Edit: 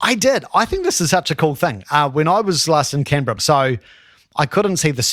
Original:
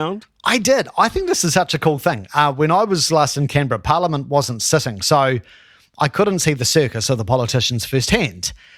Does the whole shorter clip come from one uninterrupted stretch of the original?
no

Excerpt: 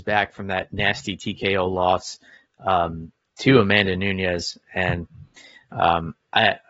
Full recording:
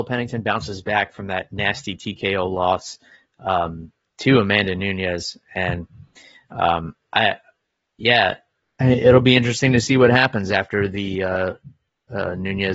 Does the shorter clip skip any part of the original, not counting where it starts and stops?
no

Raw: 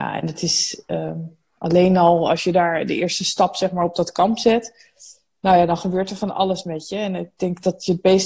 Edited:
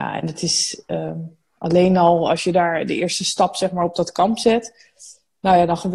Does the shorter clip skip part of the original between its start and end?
no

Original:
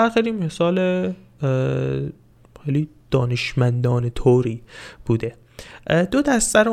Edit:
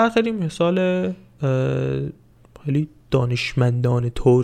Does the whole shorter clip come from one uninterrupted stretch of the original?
yes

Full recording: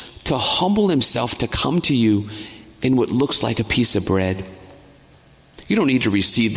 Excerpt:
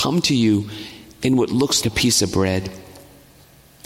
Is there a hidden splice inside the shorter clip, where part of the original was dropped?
yes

